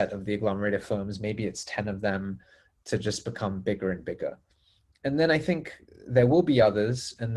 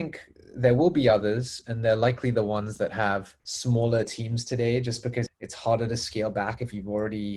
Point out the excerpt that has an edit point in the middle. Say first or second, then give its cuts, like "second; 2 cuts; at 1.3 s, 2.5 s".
second; 2 cuts; at 3.4 s, 5.3 s